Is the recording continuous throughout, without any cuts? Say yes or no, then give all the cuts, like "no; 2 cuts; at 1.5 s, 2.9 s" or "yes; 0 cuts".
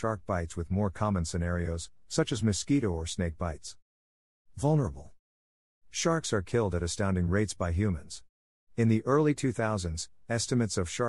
yes; 0 cuts